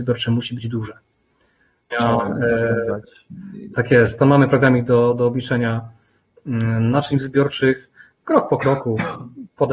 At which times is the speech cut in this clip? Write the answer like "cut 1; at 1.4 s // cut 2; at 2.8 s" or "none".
cut 1; at 1.9 s